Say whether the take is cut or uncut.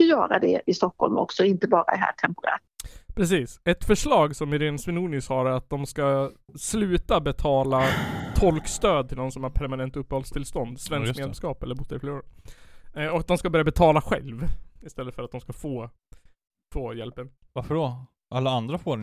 uncut